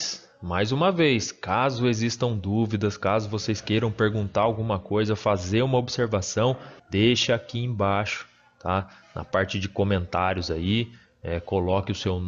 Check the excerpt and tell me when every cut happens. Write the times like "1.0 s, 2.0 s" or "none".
6.8 s

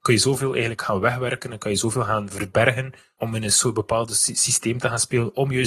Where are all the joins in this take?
3.2 s

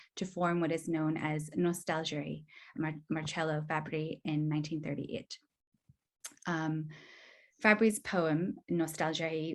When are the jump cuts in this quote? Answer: 2.7 s

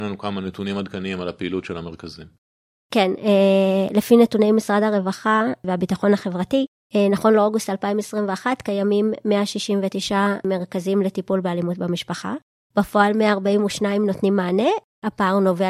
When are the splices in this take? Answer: none

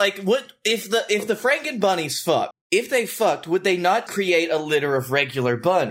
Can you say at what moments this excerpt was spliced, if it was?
2.5 s, 4.1 s

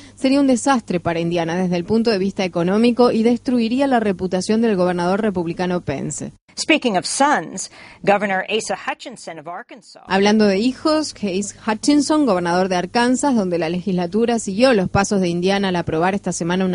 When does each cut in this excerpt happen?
none

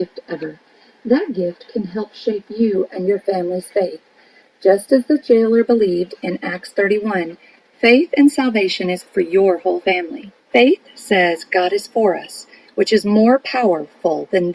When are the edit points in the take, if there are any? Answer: 9.1 s, 10.4 s

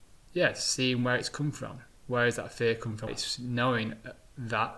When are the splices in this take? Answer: 3.1 s

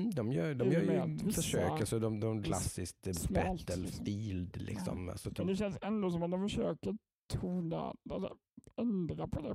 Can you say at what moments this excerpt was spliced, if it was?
2.4 s, 5.4 s

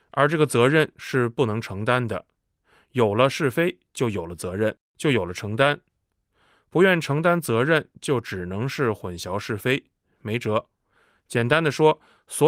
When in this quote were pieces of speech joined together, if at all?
none

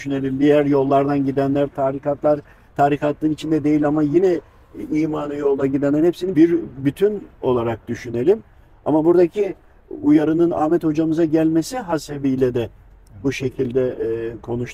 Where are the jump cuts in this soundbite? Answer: 6.3 s

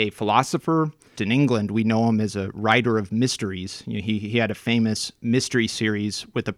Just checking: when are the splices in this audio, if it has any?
1.1 s

